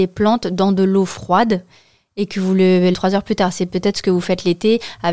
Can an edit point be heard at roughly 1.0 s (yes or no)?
no